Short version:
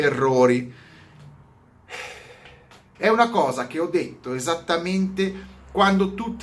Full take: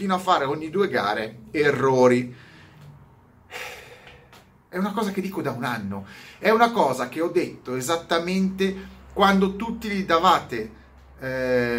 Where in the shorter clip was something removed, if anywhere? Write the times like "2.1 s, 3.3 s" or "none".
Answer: 2.9 s